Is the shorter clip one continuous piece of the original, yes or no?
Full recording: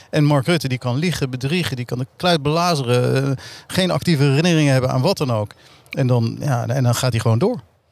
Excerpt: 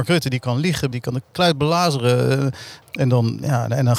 no